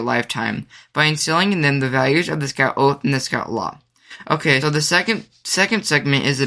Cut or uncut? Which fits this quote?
cut